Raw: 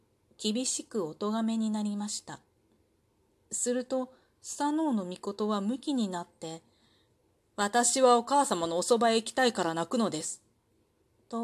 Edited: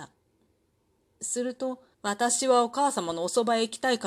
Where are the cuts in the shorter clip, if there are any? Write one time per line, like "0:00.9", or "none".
0:01.9